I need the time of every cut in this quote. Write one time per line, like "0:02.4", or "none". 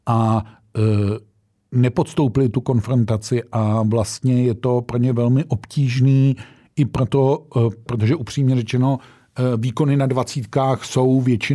0:07.9